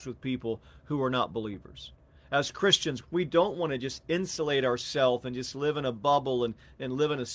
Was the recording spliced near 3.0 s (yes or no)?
yes